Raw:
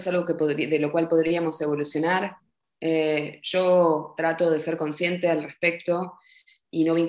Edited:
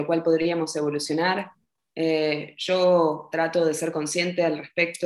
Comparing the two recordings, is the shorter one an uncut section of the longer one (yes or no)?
yes